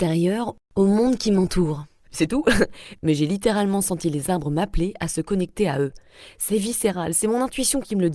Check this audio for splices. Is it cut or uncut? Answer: cut